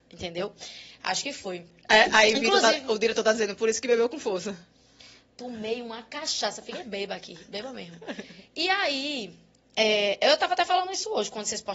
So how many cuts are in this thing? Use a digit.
0